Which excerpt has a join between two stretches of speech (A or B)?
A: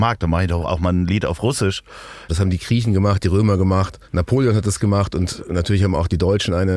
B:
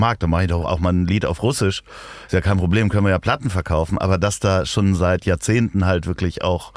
A